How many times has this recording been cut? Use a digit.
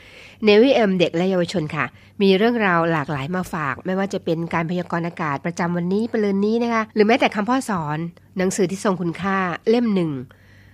1